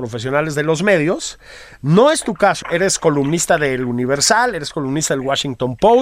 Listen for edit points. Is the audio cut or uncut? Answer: cut